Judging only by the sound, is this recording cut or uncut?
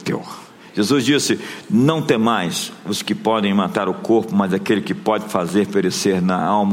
uncut